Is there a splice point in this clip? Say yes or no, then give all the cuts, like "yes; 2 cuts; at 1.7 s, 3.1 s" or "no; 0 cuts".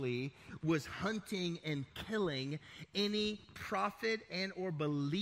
no; 0 cuts